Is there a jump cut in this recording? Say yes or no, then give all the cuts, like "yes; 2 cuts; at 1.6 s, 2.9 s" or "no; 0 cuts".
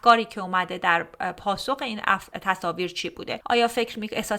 no; 0 cuts